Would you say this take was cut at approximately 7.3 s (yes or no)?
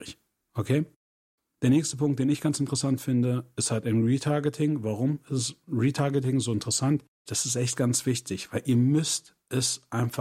yes